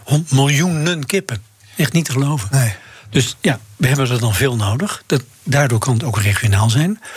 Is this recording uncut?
yes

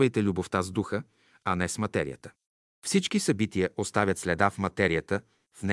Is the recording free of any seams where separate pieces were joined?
yes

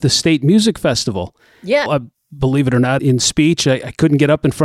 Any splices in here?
yes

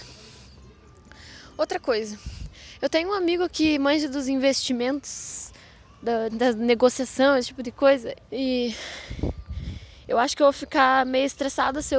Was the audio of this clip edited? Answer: yes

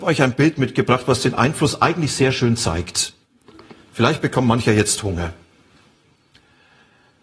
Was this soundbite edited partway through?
no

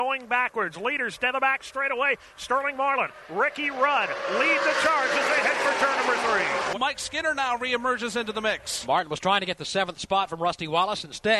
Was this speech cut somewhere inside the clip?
yes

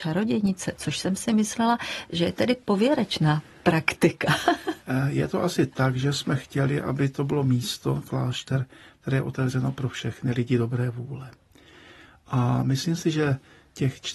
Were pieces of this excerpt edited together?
no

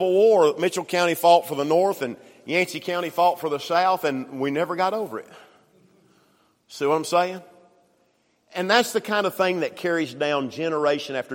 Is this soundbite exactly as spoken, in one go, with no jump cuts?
yes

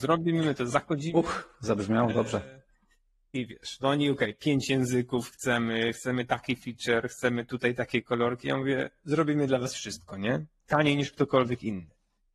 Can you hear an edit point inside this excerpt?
no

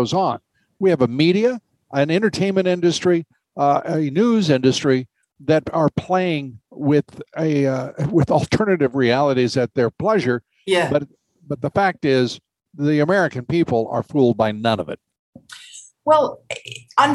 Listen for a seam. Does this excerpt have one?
no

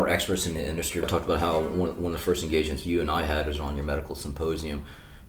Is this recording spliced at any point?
yes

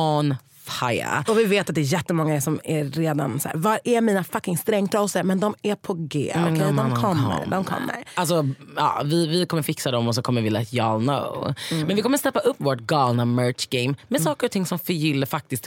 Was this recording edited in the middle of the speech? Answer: no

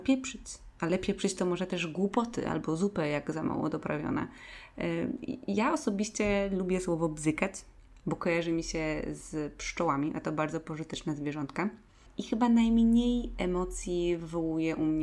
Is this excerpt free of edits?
yes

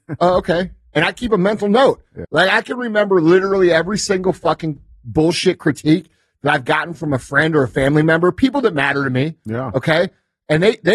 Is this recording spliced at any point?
yes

